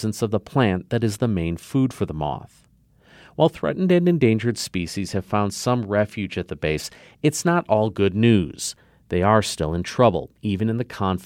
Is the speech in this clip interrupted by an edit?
no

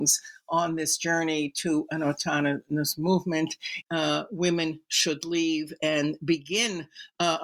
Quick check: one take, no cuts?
no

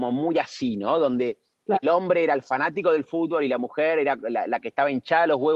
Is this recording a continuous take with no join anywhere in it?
no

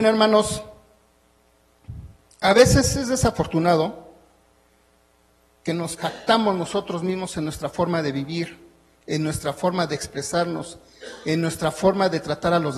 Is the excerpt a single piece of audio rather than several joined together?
yes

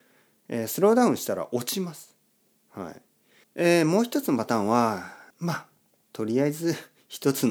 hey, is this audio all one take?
no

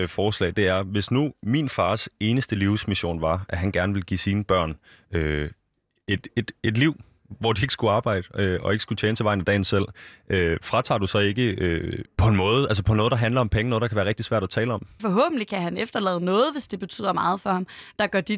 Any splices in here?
yes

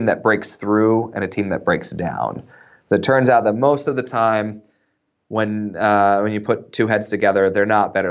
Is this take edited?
no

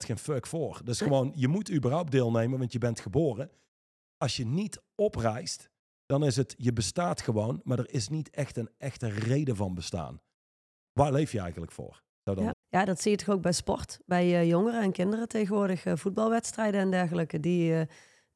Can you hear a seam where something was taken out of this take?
yes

